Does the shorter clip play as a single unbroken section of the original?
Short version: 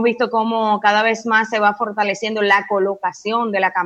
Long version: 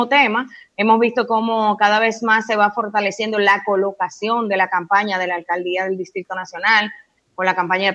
yes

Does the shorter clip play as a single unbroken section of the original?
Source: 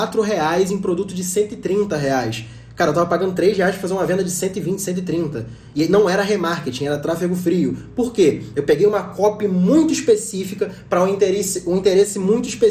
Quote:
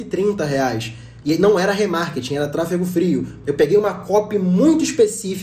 no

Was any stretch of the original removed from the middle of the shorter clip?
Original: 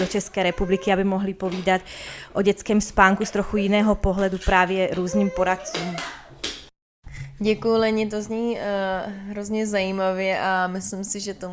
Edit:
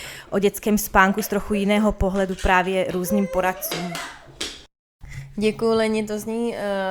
no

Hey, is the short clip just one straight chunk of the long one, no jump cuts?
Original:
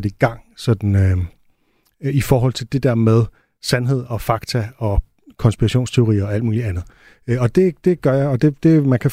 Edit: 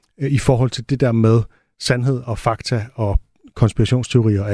yes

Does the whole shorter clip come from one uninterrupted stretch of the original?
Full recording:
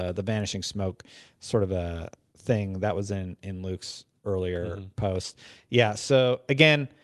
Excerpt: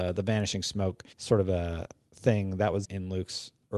no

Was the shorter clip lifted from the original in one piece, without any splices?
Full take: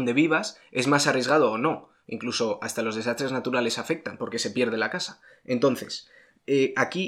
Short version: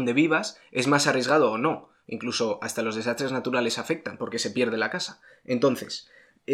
yes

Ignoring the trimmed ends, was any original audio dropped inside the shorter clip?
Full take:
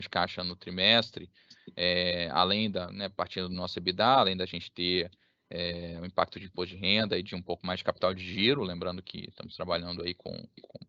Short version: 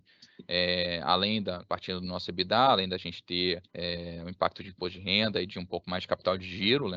yes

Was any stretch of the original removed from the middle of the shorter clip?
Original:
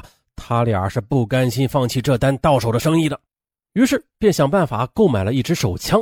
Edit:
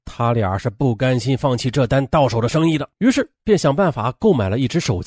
yes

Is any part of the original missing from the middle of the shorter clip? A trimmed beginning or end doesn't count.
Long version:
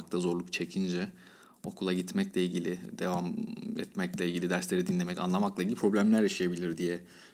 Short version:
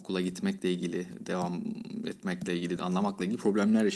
yes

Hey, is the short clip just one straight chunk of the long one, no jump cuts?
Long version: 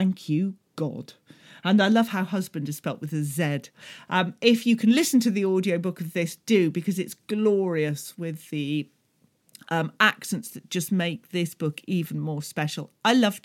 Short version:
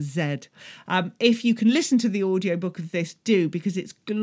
yes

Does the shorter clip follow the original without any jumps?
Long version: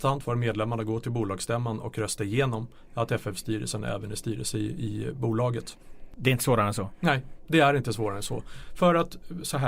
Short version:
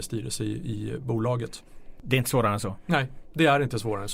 yes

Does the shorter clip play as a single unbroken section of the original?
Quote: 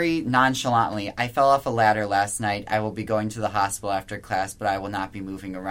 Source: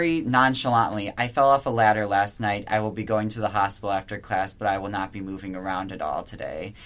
yes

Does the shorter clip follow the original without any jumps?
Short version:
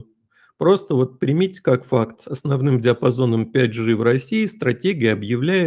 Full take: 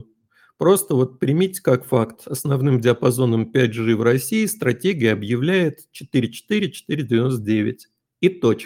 yes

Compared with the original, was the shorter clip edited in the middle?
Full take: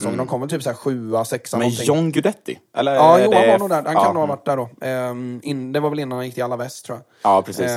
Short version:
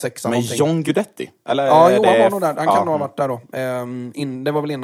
no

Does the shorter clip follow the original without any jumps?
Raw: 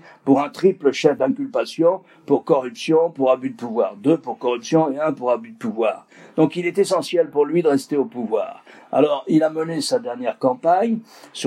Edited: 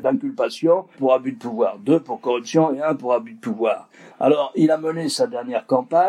no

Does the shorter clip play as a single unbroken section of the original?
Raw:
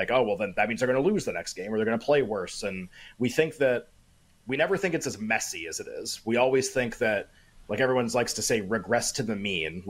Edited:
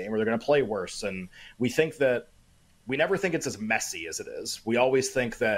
yes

